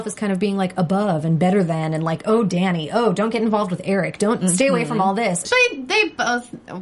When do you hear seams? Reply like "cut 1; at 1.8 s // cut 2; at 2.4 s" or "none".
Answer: cut 1; at 4.4 s // cut 2; at 5.4 s